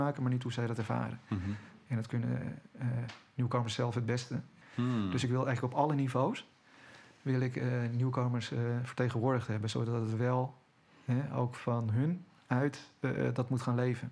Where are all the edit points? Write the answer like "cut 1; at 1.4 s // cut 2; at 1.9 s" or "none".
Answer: cut 1; at 4.6 s